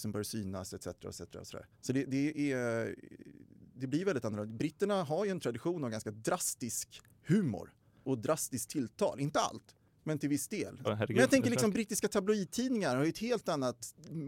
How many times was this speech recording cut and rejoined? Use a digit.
2